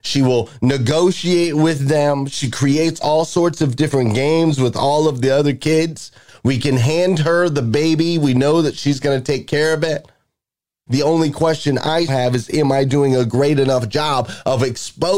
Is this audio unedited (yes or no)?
no